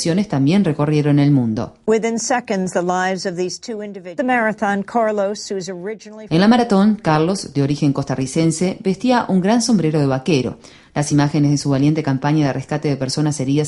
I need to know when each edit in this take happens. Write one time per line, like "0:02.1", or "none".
0:04.2